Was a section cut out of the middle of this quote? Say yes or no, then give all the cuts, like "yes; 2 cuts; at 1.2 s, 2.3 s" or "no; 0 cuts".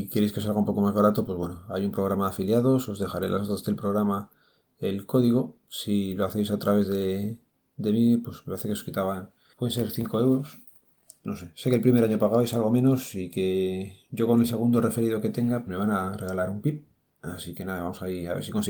yes; 1 cut; at 15.7 s